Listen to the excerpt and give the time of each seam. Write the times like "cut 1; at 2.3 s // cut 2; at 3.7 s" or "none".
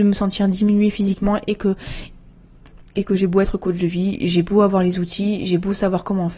none